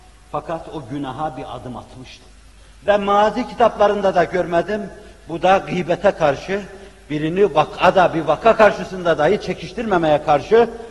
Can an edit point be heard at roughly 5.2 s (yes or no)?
no